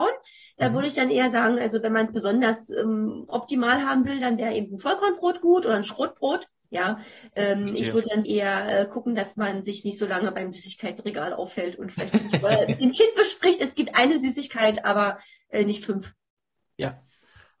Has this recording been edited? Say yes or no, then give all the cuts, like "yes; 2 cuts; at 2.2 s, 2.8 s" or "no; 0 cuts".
yes; 2 cuts; at 6.6 s, 8.2 s